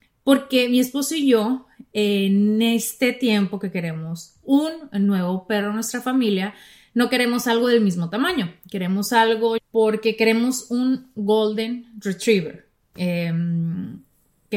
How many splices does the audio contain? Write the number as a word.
one